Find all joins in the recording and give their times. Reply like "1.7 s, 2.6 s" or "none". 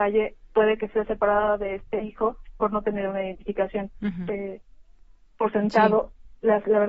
4.3 s